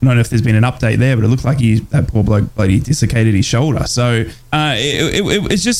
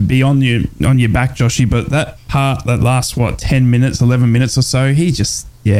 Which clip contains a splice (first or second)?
first